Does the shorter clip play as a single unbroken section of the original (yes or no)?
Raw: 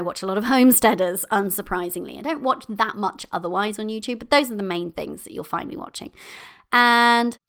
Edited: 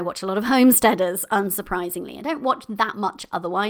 yes